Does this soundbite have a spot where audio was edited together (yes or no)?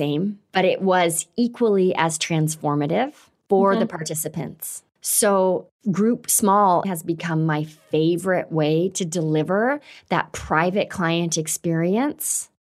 yes